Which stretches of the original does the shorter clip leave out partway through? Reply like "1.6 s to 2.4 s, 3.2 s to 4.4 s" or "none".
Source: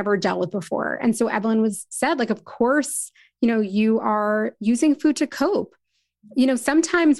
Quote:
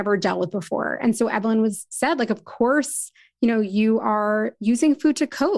none